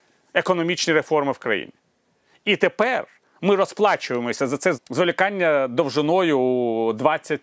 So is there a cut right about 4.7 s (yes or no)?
yes